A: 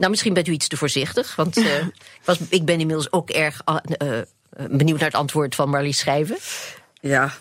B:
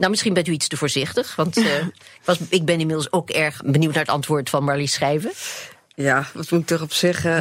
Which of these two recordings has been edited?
B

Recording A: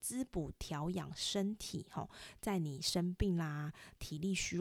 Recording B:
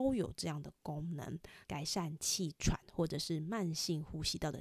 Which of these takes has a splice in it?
B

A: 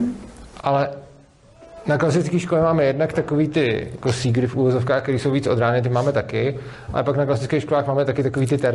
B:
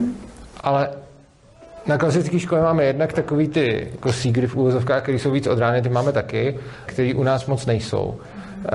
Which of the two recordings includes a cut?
B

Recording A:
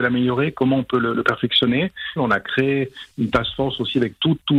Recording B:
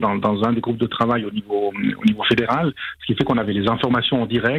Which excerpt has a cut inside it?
A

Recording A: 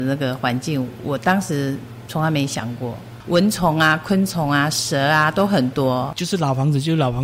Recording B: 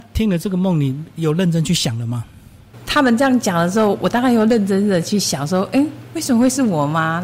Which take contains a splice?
A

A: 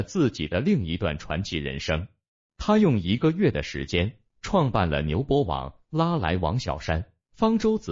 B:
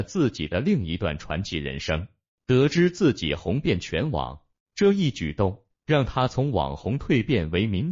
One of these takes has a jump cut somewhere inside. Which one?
B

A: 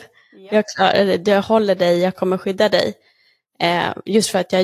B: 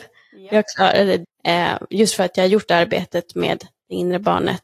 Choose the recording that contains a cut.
B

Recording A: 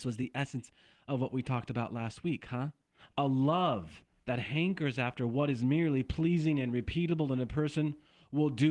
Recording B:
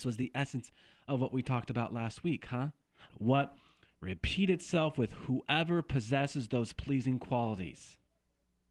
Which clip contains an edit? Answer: B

